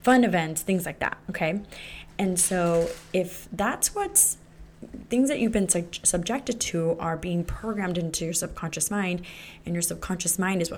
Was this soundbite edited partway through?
no; 0 cuts

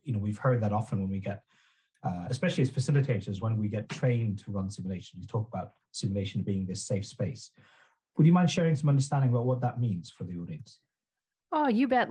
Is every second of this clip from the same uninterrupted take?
yes; 0 cuts

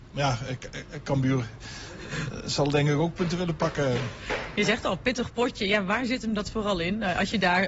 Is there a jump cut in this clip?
no; 0 cuts

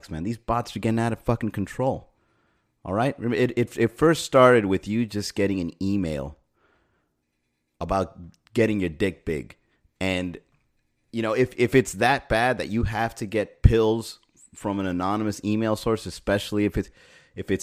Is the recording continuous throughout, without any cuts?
yes; 0 cuts

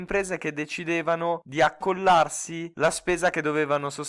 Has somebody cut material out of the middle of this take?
no; 0 cuts

